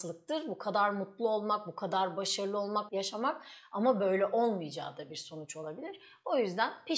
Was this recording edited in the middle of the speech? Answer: yes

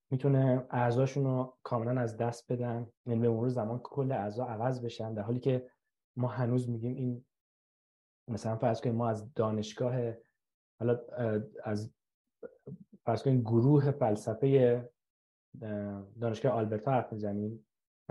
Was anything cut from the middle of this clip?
yes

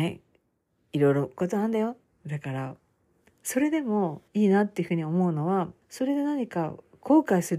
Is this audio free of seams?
no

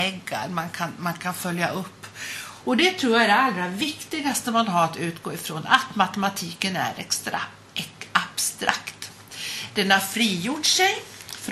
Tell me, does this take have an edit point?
yes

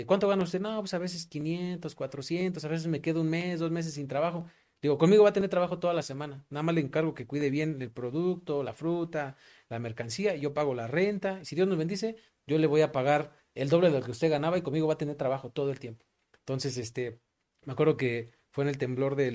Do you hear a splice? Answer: no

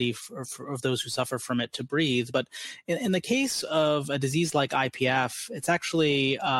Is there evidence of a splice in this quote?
no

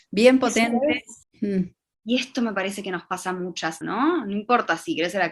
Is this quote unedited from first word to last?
no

